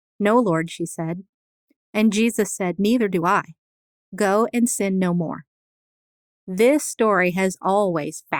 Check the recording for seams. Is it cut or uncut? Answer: uncut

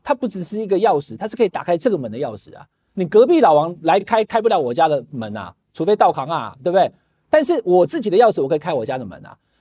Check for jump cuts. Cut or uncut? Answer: uncut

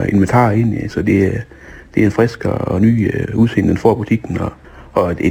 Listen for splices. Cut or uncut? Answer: uncut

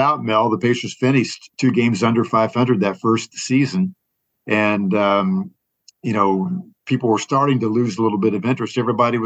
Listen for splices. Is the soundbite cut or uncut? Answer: cut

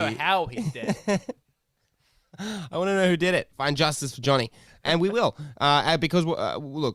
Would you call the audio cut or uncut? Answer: uncut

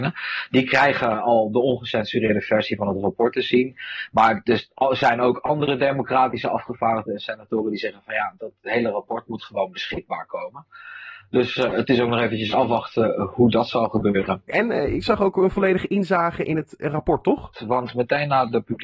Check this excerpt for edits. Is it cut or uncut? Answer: cut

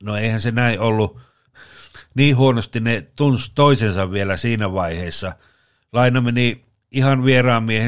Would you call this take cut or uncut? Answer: cut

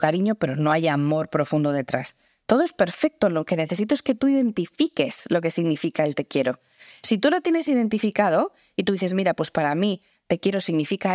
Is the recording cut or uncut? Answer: uncut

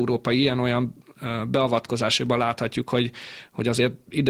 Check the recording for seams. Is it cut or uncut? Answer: uncut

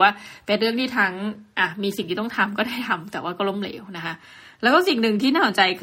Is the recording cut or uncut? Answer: uncut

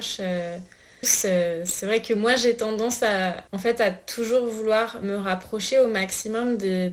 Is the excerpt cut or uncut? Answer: cut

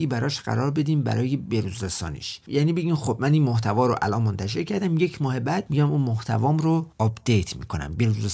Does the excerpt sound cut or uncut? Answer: cut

